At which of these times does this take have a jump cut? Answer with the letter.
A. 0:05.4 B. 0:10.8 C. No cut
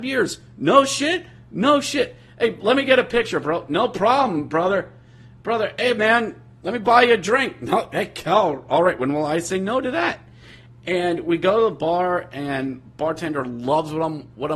C